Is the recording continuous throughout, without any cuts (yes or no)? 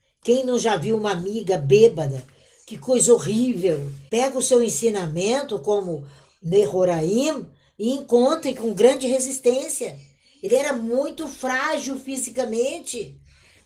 no